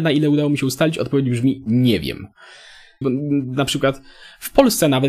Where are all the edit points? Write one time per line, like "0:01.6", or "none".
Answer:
0:03.0